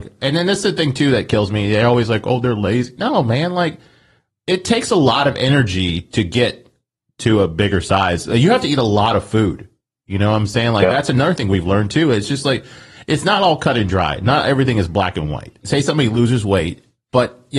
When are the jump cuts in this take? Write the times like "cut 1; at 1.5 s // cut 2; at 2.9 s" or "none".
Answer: cut 1; at 15.6 s